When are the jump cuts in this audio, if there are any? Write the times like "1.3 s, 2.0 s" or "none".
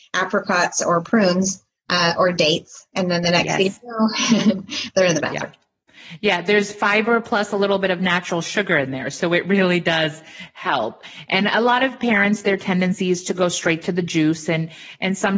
none